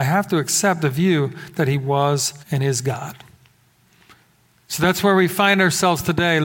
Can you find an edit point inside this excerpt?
yes; 1 cut; at 2.4 s

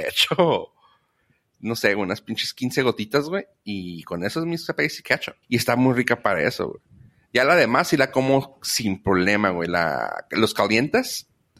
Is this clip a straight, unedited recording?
no; 1 cut; at 5.4 s

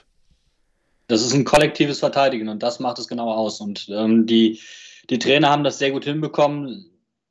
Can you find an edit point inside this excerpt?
no; 0 cuts

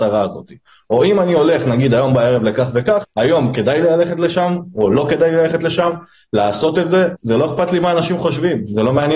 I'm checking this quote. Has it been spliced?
yes; 2 cuts; at 3.0 s, 7.1 s

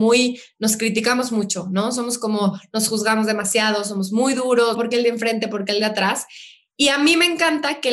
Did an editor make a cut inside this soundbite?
yes; 1 cut; at 4.7 s

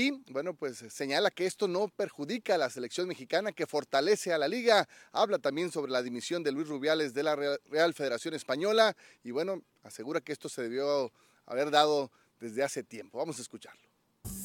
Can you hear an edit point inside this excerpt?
no; 0 cuts

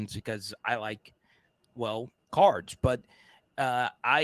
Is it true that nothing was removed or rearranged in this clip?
no; 1 cut; at 2.3 s

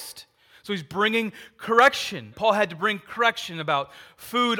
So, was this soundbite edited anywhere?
yes; 1 cut; at 2.3 s

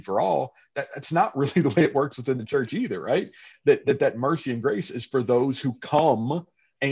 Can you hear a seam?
no; 0 cuts

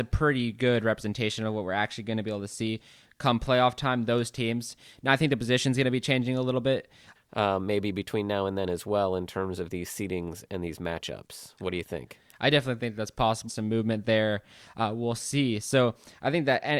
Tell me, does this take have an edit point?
yes; 2 cuts; at 7.1 s, 13.5 s

